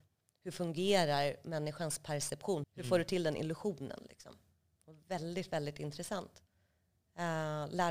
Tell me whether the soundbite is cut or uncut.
cut